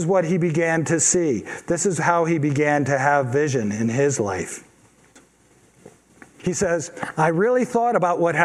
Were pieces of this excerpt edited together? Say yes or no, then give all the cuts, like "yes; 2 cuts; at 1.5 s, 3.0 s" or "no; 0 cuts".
no; 0 cuts